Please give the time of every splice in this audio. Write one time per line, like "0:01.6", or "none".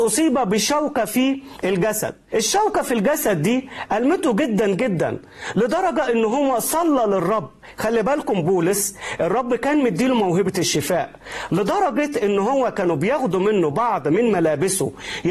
none